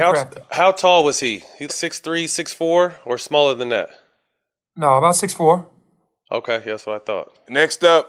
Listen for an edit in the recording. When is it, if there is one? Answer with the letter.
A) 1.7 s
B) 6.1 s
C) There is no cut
A